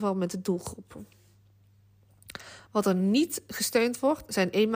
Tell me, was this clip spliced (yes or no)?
no